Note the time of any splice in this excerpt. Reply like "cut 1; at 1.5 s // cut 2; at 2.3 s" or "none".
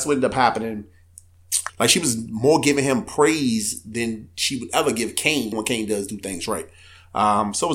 cut 1; at 1.7 s // cut 2; at 5.5 s